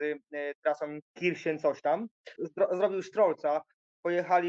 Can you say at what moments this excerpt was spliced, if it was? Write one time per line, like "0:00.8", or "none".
0:02.4